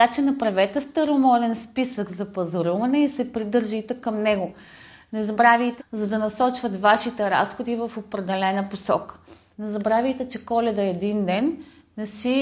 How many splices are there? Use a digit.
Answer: 2